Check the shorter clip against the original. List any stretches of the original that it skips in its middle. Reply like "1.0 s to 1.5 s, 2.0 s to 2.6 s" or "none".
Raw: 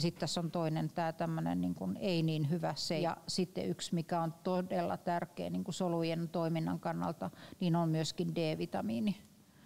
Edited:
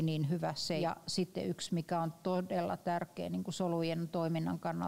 none